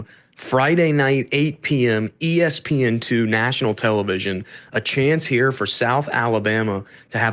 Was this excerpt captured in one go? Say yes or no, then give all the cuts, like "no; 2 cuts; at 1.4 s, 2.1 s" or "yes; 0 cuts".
yes; 0 cuts